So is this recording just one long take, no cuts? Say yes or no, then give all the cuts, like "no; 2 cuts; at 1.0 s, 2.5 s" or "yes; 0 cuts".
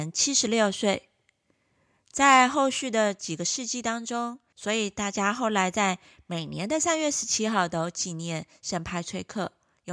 no; 1 cut; at 4.5 s